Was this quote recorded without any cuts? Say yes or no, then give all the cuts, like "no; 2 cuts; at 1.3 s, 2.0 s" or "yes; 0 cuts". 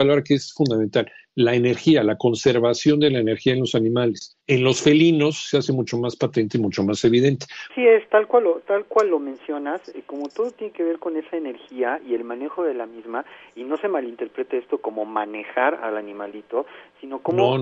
no; 2 cuts; at 4.4 s, 7.7 s